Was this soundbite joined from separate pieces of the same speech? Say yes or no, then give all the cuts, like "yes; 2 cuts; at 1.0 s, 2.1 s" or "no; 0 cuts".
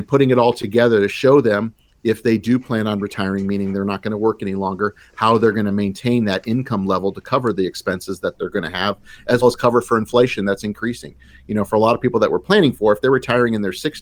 yes; 1 cut; at 9.4 s